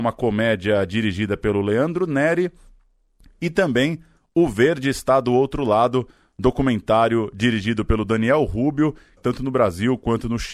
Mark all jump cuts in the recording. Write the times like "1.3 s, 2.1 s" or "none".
9.2 s